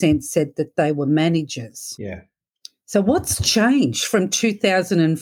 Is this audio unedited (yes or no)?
yes